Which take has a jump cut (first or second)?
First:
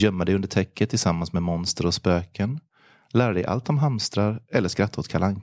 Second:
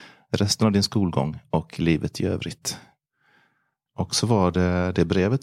second